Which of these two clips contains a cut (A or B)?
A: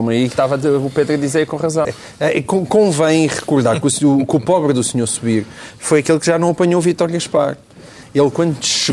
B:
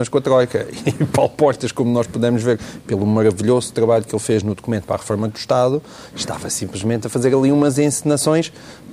A